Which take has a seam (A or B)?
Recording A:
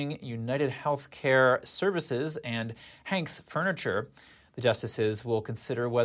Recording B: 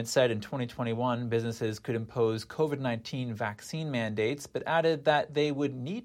A